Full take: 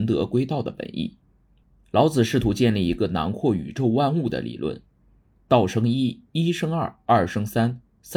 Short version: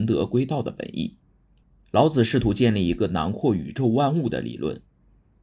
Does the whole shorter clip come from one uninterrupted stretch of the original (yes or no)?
yes